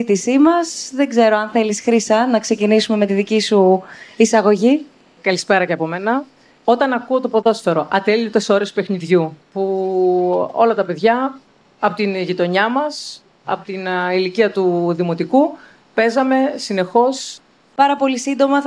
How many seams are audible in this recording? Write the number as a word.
two